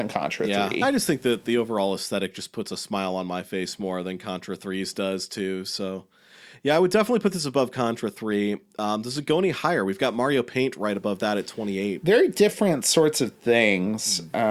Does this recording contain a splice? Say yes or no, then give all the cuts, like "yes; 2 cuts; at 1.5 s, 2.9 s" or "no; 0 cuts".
no; 0 cuts